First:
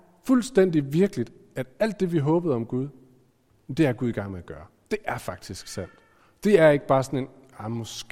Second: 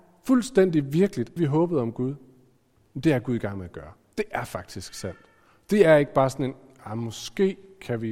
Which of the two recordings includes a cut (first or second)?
second